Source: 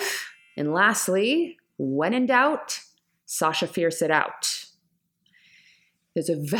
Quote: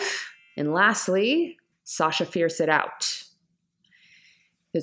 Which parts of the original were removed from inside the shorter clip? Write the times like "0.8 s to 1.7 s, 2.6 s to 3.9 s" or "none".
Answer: 1.7 s to 3.1 s

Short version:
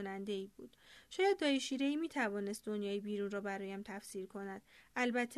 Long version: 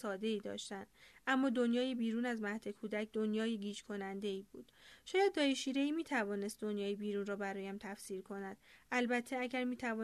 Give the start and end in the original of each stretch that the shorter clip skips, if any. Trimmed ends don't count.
none

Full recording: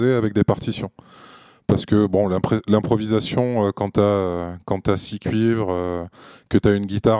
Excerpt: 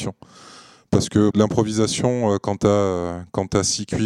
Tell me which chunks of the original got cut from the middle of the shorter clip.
2.1 s to 2.6 s

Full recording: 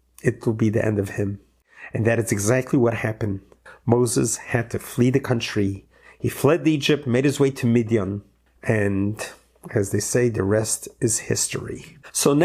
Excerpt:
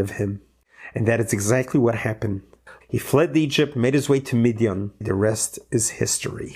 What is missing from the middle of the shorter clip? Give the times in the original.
3.8 s to 6.1 s, 8.3 s to 10.3 s

